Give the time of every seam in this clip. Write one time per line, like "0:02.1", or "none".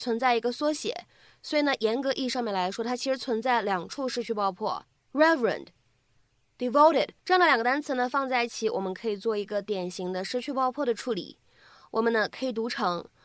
0:05.0
0:07.2